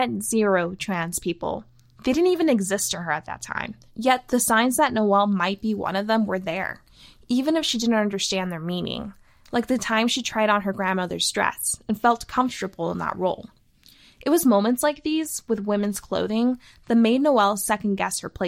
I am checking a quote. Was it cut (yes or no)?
no